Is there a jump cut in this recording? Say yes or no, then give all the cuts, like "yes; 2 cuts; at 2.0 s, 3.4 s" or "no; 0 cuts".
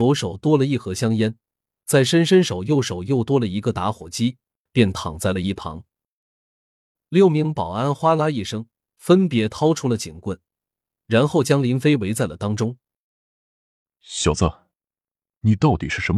yes; 1 cut; at 4.7 s